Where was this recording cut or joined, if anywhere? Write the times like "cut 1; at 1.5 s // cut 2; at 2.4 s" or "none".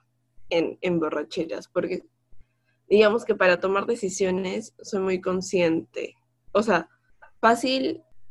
none